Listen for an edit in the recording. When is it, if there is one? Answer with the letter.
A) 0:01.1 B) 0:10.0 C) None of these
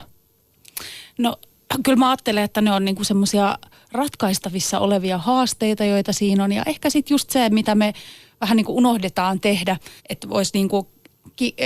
B